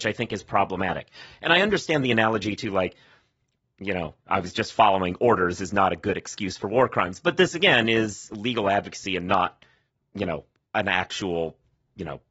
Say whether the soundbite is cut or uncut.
uncut